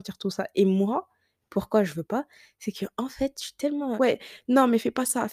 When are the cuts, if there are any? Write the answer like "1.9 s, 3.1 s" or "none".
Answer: 4.0 s